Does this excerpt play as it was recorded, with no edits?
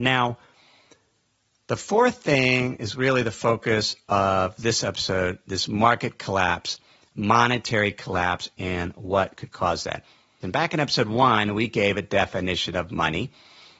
no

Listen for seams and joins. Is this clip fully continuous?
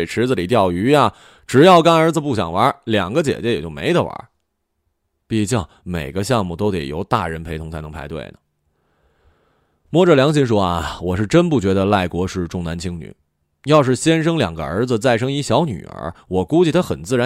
yes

